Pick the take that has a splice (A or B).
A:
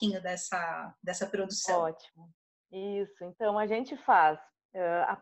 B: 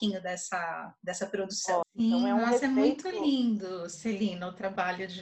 B